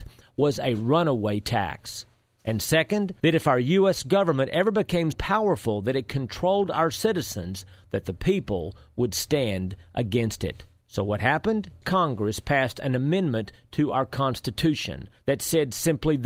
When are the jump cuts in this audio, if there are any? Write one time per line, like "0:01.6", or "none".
0:05.1
0:11.8
0:15.2